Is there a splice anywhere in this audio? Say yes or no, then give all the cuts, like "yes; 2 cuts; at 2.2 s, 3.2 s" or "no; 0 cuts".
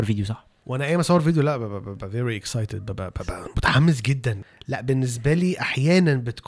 no; 0 cuts